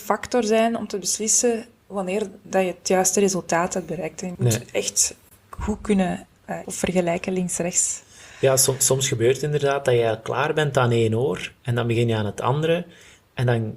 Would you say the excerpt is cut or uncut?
cut